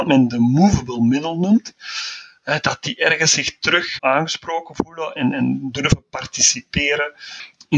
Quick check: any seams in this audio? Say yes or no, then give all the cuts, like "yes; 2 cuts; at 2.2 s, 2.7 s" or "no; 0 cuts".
yes; 2 cuts; at 4.0 s, 5.2 s